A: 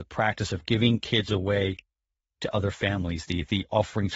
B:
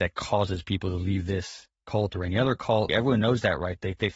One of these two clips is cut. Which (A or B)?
B